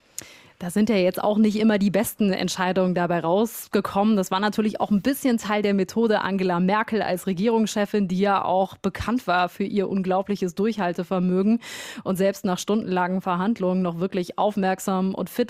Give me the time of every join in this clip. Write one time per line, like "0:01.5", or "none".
none